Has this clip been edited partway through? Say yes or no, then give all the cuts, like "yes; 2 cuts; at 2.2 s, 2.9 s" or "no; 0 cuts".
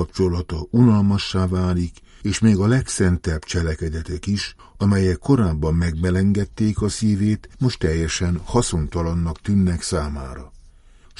no; 0 cuts